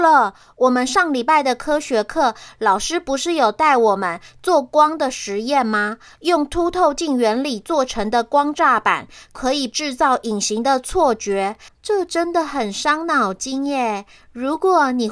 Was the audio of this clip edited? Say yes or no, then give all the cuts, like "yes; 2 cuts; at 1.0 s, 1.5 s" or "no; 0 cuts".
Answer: yes; 1 cut; at 11.7 s